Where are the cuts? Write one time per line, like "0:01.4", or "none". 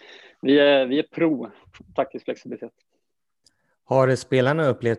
none